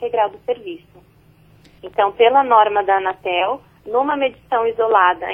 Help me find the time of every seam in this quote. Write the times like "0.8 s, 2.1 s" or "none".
1.8 s